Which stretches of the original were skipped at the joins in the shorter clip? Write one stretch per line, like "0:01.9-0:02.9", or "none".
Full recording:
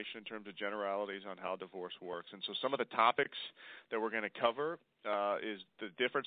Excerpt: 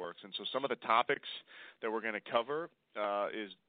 none